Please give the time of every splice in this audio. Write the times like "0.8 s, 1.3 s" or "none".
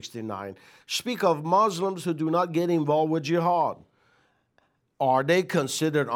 none